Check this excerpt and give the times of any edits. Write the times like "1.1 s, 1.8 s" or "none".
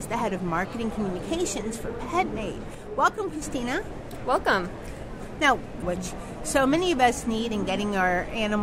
5.8 s